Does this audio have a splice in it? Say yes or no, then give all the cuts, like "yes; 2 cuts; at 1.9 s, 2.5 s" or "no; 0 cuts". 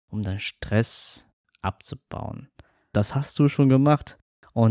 yes; 1 cut; at 2.9 s